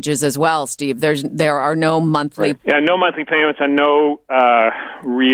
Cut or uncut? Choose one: cut